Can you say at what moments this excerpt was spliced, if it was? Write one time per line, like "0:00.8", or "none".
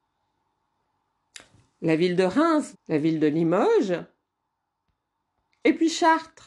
0:02.7